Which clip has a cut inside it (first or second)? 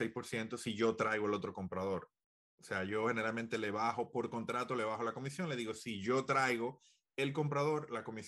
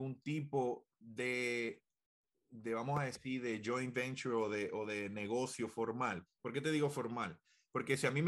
second